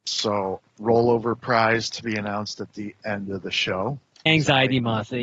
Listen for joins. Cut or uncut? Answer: cut